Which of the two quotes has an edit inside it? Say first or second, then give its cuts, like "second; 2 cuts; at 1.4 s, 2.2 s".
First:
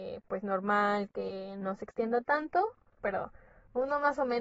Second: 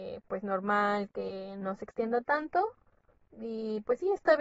first; 1 cut; at 3.0 s